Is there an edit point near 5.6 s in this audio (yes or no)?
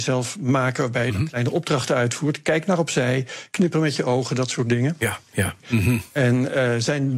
yes